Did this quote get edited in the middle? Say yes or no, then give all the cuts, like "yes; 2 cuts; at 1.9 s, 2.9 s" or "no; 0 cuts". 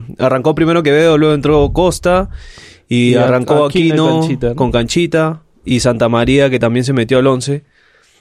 no; 0 cuts